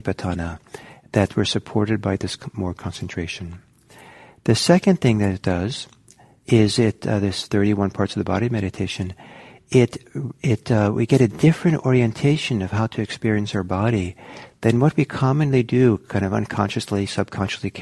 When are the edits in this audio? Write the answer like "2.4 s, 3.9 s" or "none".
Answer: none